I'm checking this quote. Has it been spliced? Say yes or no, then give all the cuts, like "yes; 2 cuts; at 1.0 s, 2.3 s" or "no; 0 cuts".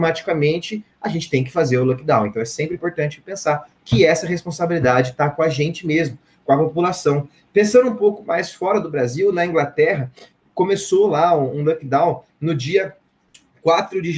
no; 0 cuts